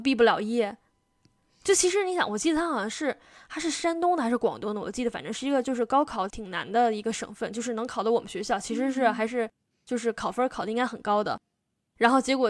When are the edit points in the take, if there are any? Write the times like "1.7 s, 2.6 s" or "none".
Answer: 6.3 s